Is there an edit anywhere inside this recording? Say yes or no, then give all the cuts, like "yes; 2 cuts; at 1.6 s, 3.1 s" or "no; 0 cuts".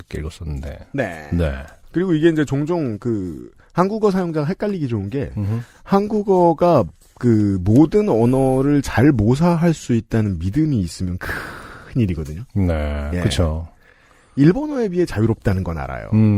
no; 0 cuts